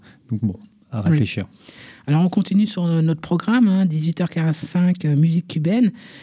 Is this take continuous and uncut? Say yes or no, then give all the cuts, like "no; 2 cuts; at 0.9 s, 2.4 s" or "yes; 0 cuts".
yes; 0 cuts